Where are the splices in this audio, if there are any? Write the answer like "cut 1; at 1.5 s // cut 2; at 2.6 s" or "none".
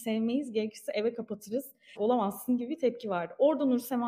cut 1; at 2.0 s